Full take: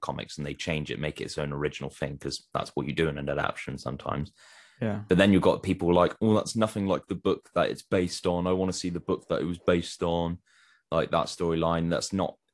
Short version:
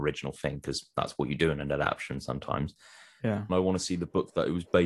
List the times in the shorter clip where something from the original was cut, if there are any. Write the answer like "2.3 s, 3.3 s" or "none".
3.5 s